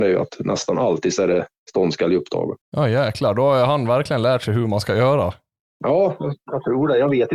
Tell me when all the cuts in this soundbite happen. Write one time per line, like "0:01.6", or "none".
0:02.6